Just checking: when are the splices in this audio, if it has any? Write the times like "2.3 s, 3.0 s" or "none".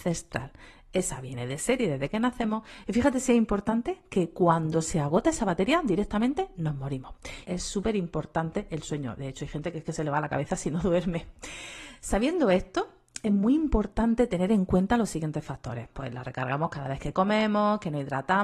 7.4 s, 15.9 s